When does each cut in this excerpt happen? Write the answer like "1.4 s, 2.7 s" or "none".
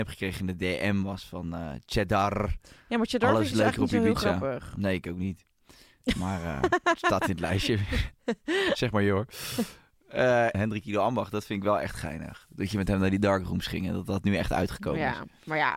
10.5 s